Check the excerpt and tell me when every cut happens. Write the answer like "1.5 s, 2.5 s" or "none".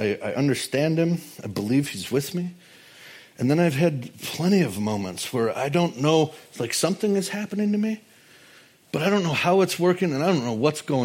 none